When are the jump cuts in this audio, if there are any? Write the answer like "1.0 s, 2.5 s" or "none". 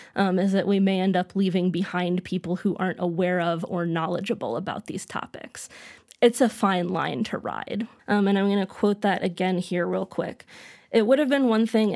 8.0 s